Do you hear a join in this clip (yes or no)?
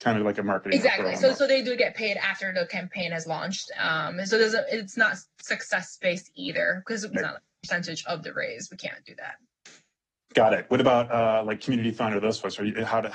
yes